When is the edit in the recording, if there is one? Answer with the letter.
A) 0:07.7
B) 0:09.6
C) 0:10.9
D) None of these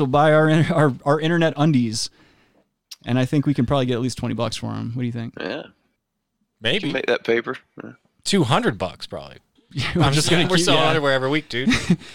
B